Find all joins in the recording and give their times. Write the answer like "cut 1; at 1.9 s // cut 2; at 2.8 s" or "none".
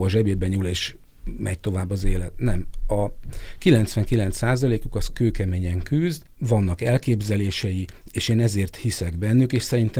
none